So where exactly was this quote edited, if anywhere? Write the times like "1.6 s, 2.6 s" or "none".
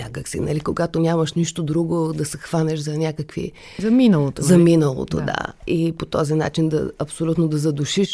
none